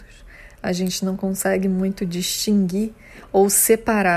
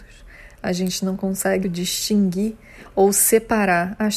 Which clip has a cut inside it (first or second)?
second